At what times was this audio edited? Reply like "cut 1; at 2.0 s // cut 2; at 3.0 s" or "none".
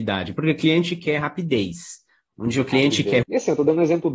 cut 1; at 3.2 s